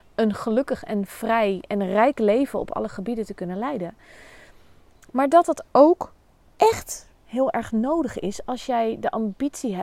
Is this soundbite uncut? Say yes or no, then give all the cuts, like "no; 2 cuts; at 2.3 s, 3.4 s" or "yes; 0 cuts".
yes; 0 cuts